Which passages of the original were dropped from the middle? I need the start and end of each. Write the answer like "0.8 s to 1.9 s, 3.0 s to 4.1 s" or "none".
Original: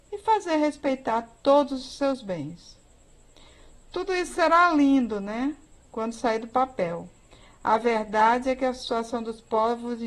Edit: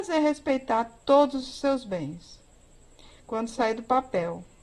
3.6 s to 5.9 s